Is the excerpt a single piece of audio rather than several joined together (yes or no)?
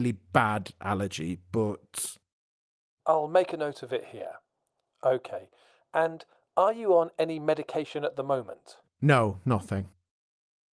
yes